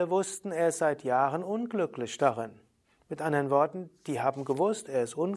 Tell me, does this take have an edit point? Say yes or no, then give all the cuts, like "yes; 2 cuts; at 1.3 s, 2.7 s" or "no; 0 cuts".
no; 0 cuts